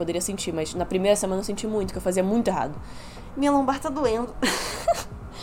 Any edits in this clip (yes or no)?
yes